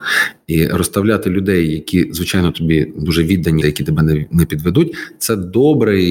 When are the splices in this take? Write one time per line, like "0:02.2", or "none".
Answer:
0:03.6